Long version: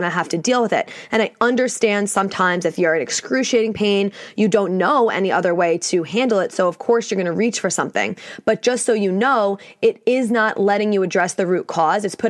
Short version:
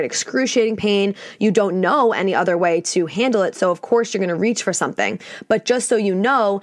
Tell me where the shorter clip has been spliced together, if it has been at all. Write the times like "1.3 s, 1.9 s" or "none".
none